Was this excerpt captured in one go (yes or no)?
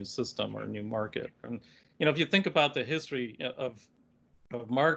no